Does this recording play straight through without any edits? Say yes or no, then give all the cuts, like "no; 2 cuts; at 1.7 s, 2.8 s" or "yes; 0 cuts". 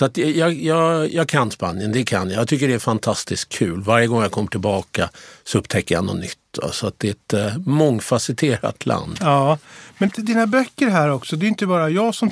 no; 1 cut; at 10.1 s